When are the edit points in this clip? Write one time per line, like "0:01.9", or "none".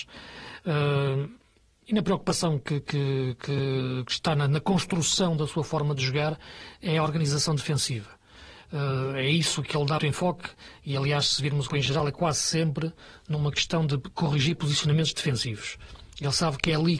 0:10.0
0:11.7